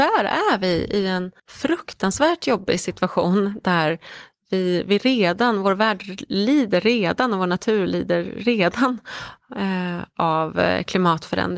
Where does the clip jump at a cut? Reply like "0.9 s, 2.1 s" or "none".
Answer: 1.4 s